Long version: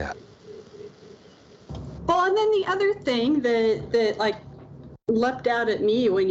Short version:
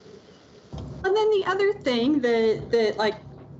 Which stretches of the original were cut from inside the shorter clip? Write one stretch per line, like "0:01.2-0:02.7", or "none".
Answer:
0:02.0-0:02.2